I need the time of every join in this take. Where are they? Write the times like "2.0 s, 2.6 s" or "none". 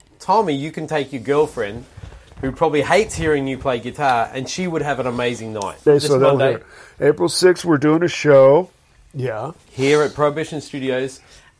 5.9 s